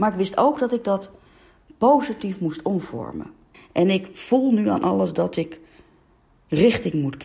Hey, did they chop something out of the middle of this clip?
yes; 1 cut; at 3.5 s

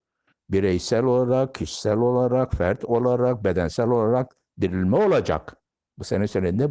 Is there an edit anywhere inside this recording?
no; 0 cuts

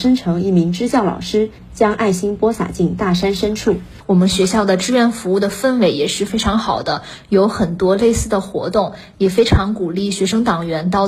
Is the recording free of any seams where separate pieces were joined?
yes; 0 cuts

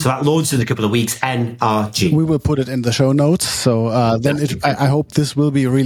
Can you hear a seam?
no; 0 cuts

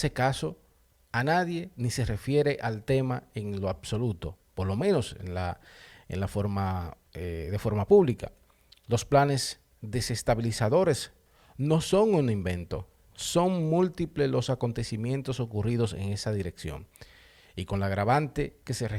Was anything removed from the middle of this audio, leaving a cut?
no; 0 cuts

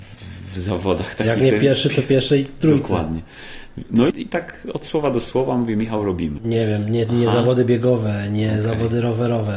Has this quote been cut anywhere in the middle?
yes; 2 cuts; at 4.1 s, 6.4 s

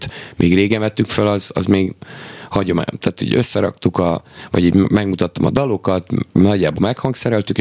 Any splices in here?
no; 0 cuts

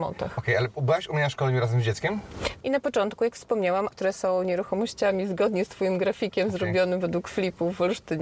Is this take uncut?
no; 2 cuts; at 2.6 s, 3.9 s

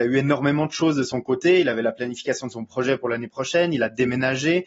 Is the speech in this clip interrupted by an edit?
no; 0 cuts

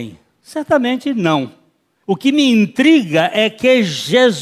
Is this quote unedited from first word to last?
no; 1 cut; at 2.0 s

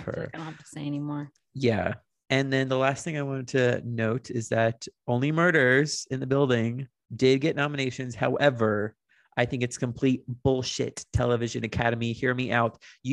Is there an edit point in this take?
yes; 1 cut; at 7.0 s

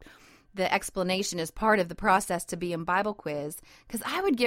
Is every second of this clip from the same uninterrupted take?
yes; 0 cuts

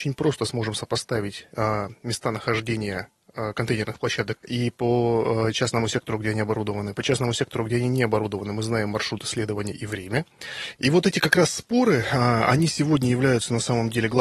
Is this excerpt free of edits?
no; 2 cuts; at 4.4 s, 10.8 s

